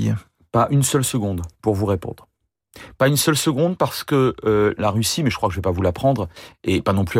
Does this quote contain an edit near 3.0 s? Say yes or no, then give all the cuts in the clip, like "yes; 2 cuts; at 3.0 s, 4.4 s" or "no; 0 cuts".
no; 1 cut; at 4.8 s